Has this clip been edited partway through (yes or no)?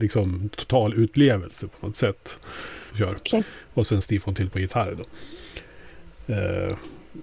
yes